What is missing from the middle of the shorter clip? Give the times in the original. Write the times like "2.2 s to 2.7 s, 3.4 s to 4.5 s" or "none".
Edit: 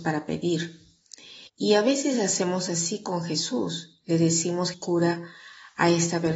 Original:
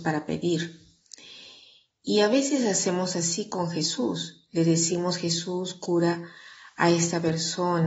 1.5 s to 1.9 s, 5.2 s to 5.7 s